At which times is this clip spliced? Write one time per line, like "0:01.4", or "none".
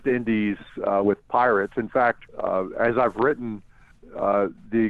0:02.3